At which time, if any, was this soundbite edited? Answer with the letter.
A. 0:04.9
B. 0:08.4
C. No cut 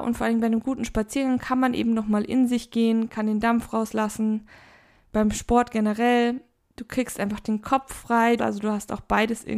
B